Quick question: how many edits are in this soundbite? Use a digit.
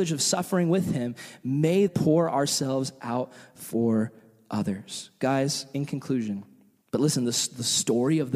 2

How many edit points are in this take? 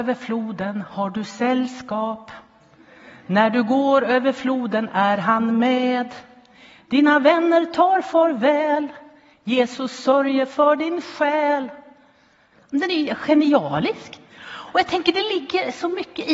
1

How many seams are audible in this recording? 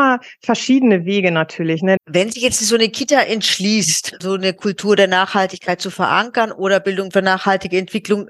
1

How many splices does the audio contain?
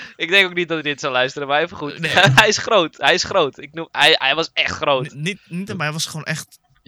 1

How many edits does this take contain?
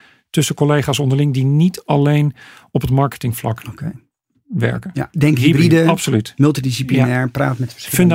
1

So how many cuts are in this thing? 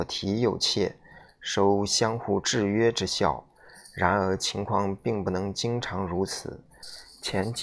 0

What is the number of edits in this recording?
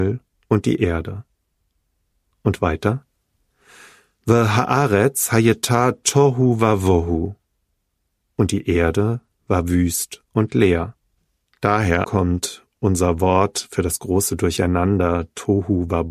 1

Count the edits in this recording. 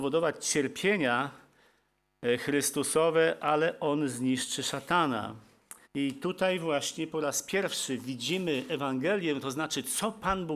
1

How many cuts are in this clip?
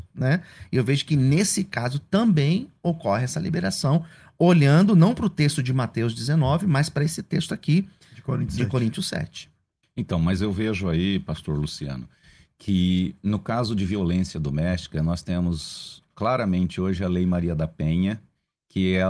1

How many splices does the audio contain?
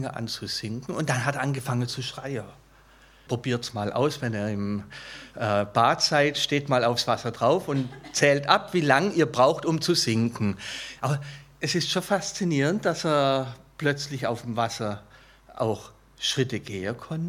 2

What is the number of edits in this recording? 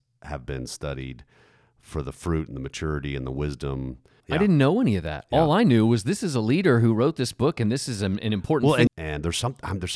2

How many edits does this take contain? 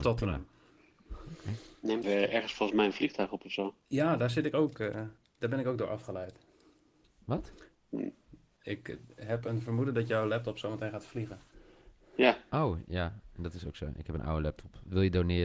1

